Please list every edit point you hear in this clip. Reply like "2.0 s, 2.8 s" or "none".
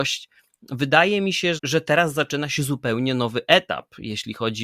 1.6 s